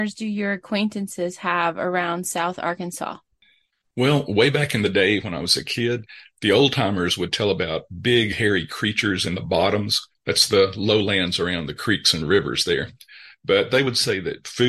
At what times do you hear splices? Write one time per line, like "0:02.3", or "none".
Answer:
none